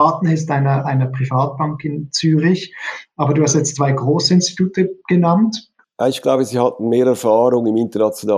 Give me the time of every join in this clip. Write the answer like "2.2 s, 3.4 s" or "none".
5.8 s